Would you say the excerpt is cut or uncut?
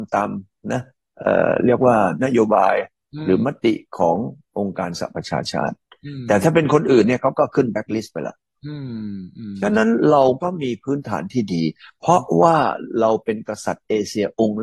uncut